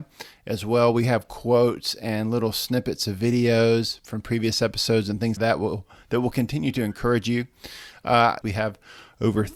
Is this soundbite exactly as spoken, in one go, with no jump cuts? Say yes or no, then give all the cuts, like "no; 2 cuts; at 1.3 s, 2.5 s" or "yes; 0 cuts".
no; 2 cuts; at 5.4 s, 8.4 s